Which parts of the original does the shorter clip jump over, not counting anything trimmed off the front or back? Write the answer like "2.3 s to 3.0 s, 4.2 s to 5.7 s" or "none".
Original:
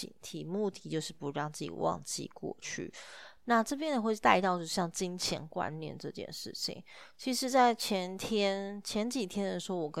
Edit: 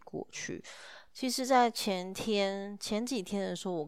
3.4 s to 7.1 s